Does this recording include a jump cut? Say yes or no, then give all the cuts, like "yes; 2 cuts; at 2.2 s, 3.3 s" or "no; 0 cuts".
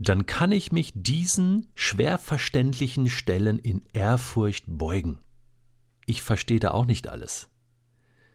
yes; 1 cut; at 5.9 s